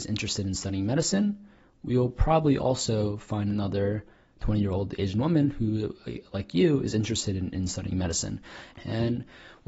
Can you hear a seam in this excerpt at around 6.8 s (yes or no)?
no